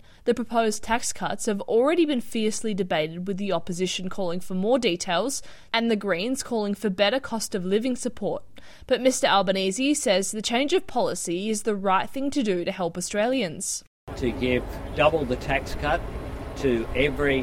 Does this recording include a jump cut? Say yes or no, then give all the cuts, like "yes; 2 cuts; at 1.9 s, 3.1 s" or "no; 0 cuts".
no; 0 cuts